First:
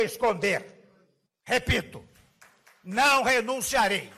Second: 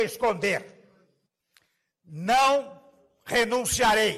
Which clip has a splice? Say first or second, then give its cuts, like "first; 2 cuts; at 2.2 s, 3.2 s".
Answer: first; 1 cut; at 1.4 s